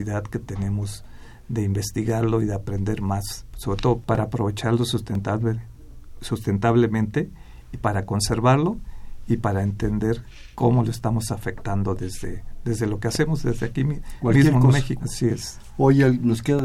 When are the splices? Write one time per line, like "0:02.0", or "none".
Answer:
0:04.0
0:15.0